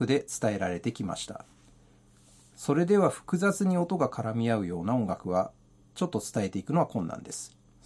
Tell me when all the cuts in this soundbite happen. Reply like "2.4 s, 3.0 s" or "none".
none